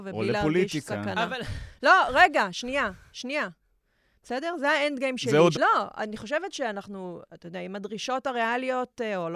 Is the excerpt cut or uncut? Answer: cut